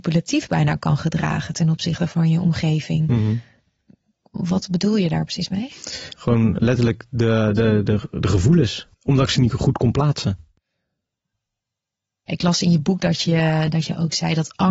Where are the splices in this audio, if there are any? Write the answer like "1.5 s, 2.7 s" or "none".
6.1 s, 8.9 s